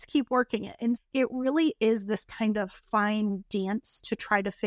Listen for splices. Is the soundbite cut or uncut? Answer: cut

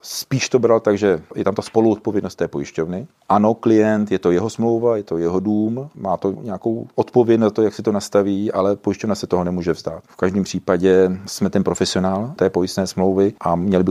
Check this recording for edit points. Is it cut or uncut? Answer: cut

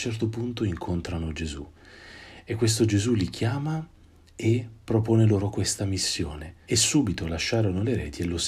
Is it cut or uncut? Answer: cut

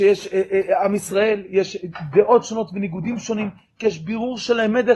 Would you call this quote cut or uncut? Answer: uncut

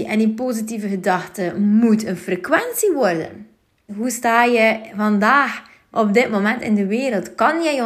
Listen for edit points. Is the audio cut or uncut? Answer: cut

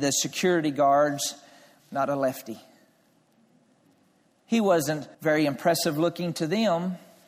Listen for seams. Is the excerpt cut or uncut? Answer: cut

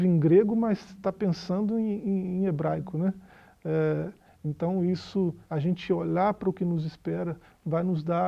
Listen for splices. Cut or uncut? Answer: cut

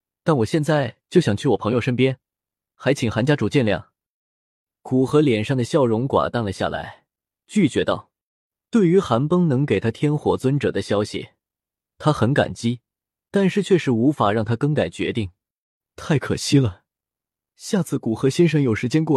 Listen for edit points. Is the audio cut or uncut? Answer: cut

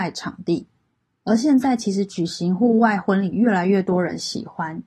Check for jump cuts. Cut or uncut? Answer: uncut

